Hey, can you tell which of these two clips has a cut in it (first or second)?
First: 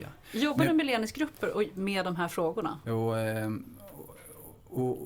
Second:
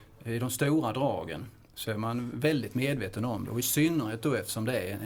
first